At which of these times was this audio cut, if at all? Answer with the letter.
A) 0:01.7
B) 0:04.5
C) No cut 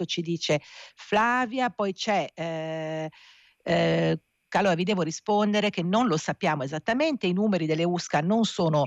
B